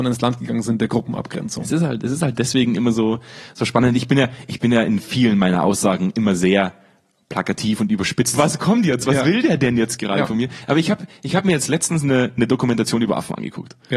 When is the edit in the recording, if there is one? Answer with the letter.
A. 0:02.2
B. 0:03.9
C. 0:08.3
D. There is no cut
C